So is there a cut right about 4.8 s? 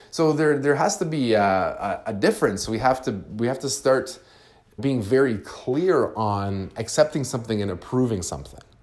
yes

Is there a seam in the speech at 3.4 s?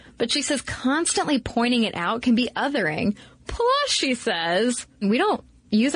no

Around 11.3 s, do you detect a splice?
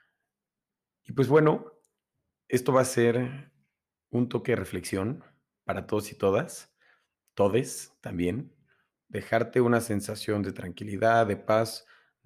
no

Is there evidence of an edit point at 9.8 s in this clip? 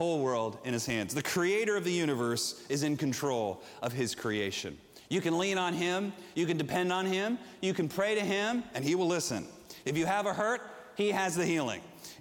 yes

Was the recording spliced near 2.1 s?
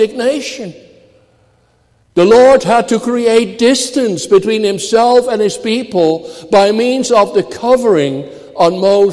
yes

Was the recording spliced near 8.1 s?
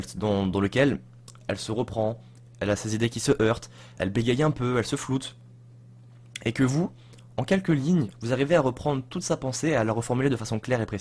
yes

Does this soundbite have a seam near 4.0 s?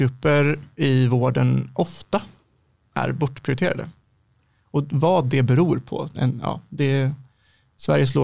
no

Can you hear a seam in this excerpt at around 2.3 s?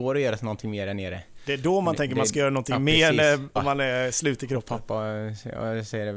no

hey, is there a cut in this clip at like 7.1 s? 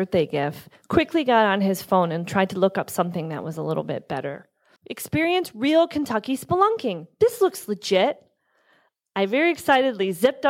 no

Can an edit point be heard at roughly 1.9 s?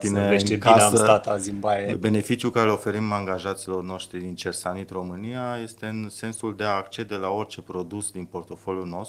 yes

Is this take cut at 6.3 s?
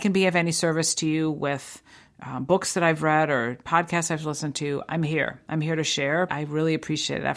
yes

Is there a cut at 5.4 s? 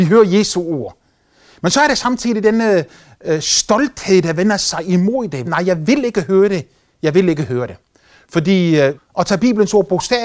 yes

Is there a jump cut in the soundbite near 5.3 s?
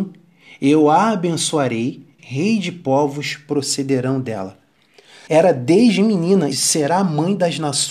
yes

